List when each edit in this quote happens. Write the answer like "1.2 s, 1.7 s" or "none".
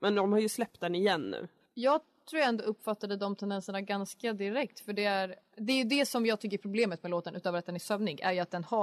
none